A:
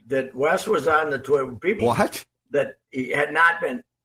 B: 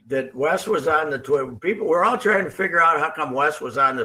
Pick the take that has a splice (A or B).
A